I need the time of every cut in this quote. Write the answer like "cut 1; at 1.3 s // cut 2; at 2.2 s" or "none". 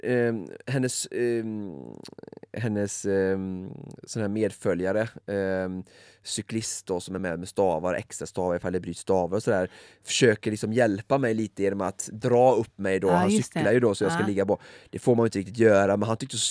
none